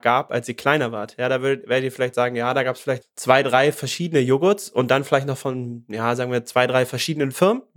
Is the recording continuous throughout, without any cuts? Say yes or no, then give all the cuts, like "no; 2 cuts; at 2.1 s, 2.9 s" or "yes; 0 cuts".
no; 1 cut; at 3.0 s